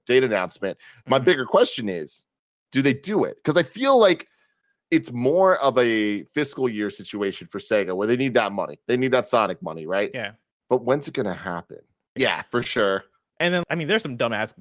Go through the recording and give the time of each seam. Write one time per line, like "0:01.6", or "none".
0:12.2
0:13.6